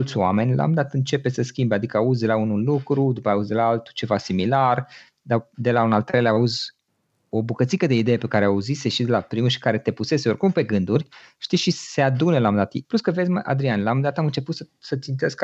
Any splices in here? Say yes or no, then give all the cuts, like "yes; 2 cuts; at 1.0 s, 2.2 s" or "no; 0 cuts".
yes; 1 cut; at 12.8 s